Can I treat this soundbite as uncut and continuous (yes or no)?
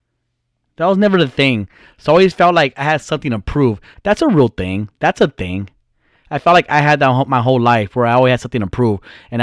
no